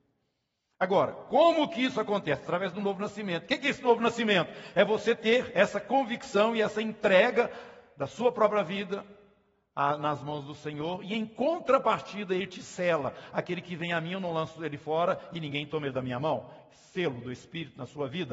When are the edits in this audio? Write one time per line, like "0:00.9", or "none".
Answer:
none